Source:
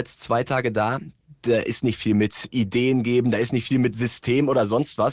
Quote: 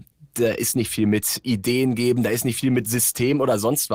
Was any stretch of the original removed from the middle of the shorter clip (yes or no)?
no